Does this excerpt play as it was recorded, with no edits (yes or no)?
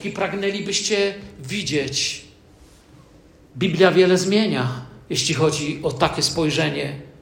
yes